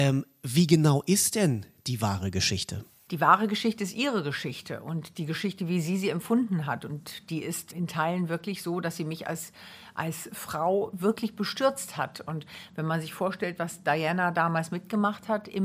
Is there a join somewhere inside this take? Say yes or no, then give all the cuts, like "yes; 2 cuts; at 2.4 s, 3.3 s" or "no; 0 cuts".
yes; 1 cut; at 7.7 s